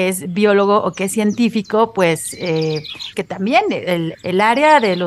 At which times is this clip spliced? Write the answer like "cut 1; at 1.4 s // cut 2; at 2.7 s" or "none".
cut 1; at 3.1 s // cut 2; at 4.1 s